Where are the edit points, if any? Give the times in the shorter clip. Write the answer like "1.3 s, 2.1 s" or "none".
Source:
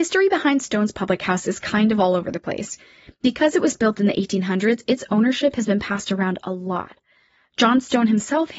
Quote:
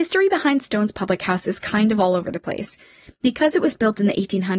none